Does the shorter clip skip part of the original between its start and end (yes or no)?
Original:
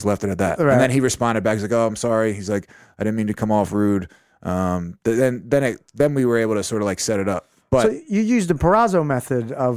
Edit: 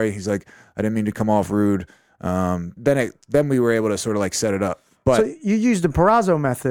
yes